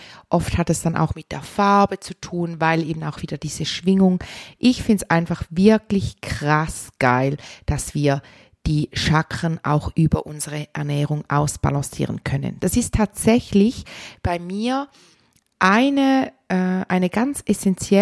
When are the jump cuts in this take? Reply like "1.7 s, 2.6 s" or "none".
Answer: none